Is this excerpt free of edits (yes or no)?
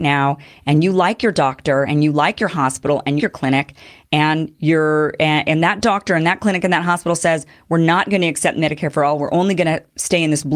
no